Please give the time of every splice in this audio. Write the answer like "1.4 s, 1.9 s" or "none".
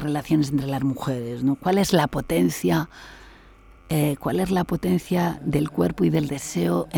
none